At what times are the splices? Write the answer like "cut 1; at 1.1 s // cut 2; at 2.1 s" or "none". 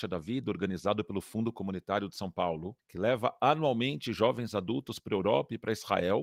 none